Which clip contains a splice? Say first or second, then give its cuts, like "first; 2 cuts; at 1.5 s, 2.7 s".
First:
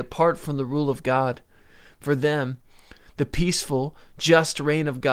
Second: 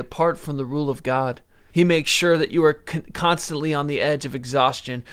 second; 1 cut; at 1.7 s